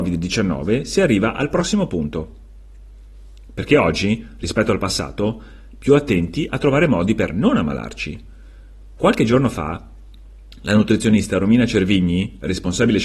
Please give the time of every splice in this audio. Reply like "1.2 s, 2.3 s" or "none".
5.7 s